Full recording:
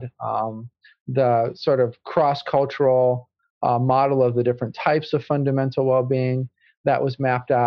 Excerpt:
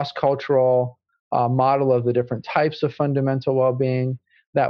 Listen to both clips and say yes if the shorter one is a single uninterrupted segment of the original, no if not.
yes